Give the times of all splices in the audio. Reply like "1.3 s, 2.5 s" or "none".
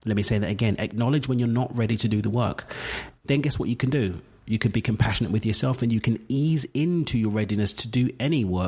none